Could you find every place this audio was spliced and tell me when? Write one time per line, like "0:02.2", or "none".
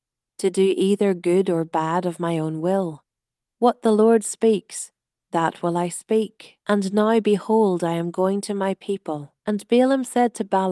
0:06.6
0:09.4